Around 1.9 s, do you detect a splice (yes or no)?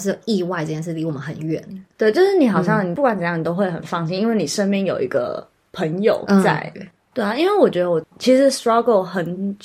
no